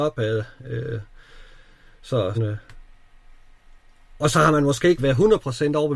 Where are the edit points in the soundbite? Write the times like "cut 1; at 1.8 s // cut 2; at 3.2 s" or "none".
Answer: cut 1; at 2.3 s // cut 2; at 5.0 s